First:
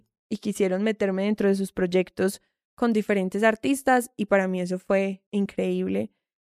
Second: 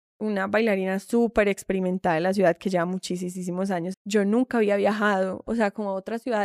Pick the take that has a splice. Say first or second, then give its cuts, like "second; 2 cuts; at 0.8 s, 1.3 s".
second; 1 cut; at 3.9 s